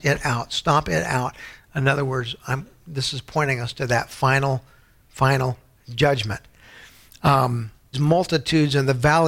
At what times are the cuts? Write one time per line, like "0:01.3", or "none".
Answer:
0:07.9